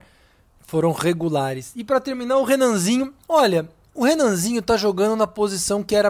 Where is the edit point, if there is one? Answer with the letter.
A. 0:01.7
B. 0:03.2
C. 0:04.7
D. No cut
B